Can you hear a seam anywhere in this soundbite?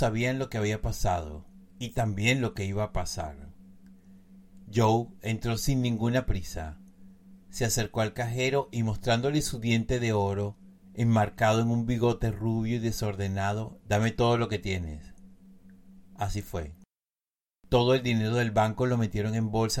yes; 1 cut; at 13.8 s

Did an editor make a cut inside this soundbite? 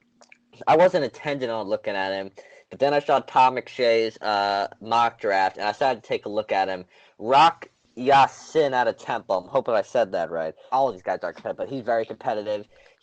yes; 1 cut; at 10.7 s

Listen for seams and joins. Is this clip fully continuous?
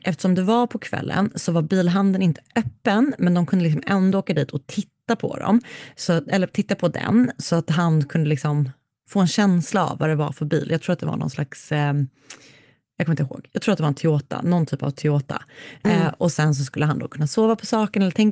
yes; 0 cuts

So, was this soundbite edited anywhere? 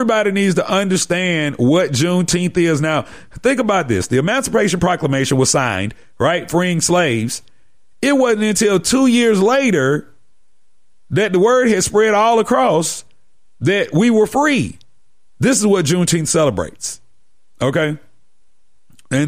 no; 0 cuts

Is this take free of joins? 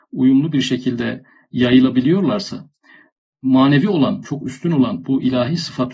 no; 1 cut; at 4.2 s

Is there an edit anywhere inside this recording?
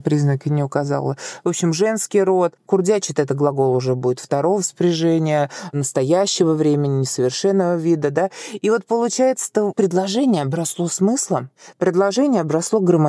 no; 0 cuts

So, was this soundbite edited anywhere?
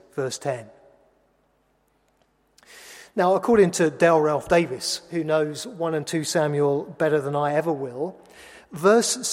no; 0 cuts

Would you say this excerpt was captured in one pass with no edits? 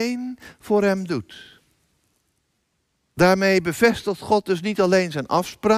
yes; 0 cuts

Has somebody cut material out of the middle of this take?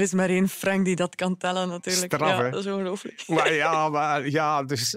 no; 0 cuts

